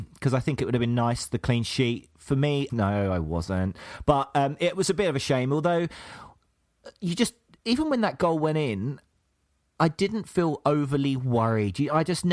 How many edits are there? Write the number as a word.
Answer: one